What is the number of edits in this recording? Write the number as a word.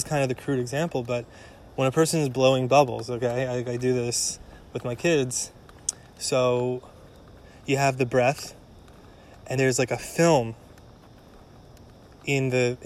one